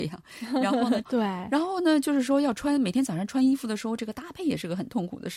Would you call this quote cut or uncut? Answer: cut